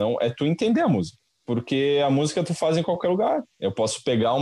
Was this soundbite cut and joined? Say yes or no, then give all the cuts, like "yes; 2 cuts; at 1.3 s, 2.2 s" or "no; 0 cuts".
no; 0 cuts